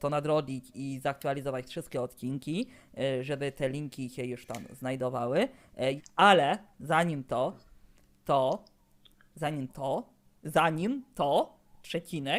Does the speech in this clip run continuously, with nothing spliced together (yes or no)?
no